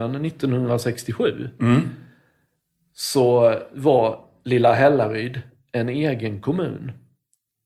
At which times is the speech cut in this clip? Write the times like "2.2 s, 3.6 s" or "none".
none